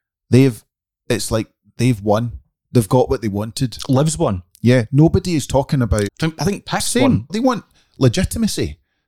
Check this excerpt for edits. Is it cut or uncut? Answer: cut